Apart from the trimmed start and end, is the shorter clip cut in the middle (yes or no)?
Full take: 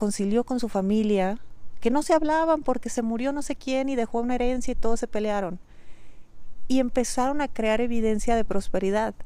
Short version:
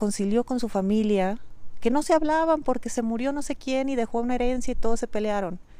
no